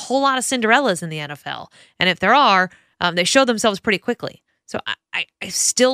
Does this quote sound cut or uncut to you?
uncut